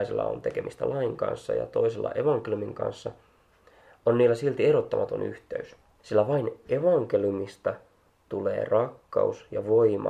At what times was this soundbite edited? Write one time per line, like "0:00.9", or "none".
0:06.0